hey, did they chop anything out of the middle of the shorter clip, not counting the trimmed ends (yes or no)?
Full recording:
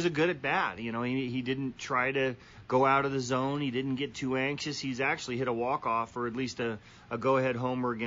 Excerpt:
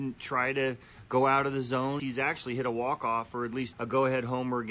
yes